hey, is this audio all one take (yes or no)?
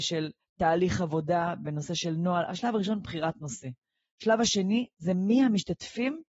yes